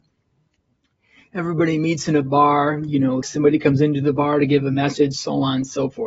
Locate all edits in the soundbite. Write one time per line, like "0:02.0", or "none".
0:03.2